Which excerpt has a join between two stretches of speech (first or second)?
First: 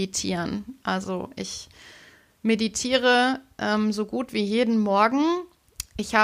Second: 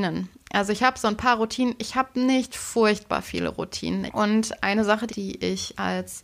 second